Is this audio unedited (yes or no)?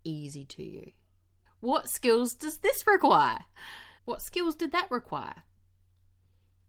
no